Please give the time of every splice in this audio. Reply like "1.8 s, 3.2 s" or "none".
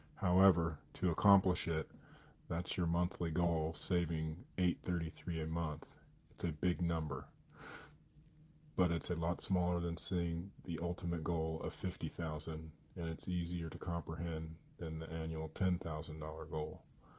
none